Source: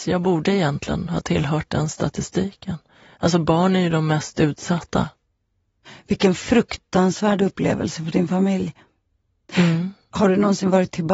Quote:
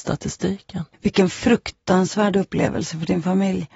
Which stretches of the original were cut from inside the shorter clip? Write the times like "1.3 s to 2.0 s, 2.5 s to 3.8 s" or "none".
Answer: 2.9 s to 6.0 s